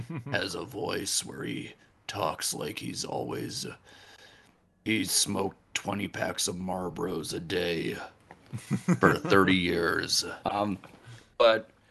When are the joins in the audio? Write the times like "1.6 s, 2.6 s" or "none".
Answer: 10.4 s

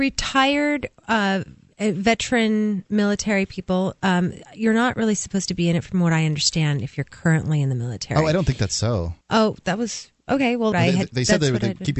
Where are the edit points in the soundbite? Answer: 9.2 s, 10.7 s

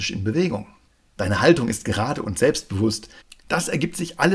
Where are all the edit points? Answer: none

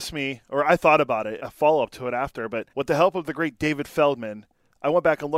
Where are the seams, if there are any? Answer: 1.4 s, 2.7 s

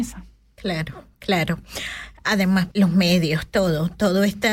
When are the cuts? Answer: 2.7 s

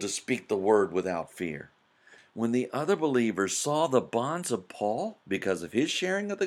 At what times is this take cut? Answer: 2.2 s

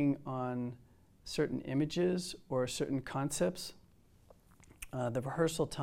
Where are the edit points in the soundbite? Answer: none

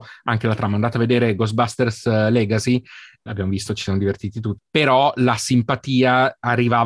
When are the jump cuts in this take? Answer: 3.3 s, 4.6 s

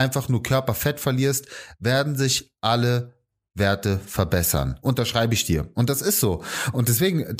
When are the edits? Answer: none

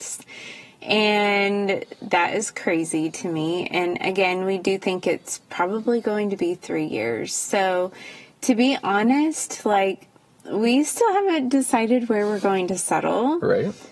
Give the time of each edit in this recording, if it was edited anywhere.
none

